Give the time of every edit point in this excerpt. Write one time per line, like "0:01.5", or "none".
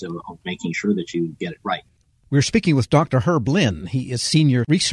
none